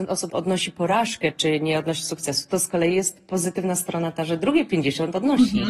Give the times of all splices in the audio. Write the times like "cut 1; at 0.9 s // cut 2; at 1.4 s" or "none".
none